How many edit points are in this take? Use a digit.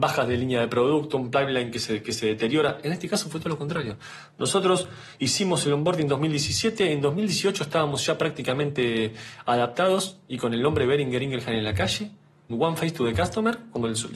1